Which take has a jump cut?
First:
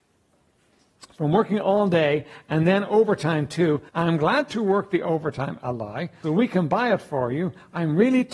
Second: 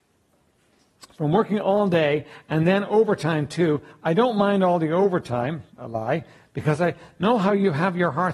first; 2 cuts; at 3.9 s, 6.2 s

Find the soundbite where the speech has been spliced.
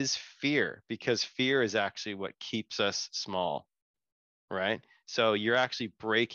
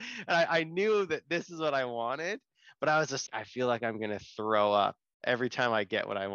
second; 1 cut; at 3.3 s

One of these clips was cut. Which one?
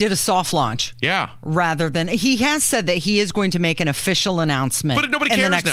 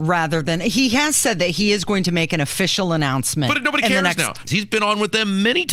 second; 1 cut; at 4.5 s

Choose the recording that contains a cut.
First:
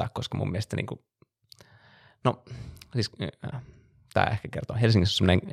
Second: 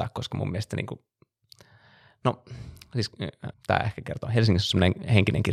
second; 1 cut; at 3.5 s

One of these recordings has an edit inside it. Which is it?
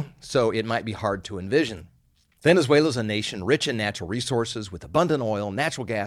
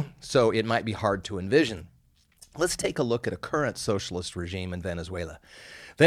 first; 1 cut; at 2.4 s

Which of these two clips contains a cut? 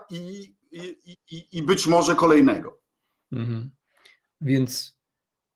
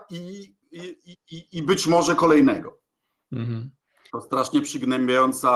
second; 1 cut; at 4.1 s

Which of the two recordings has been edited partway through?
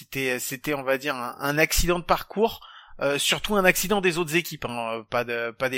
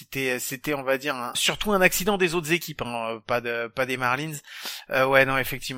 second; 1 cut; at 1.3 s

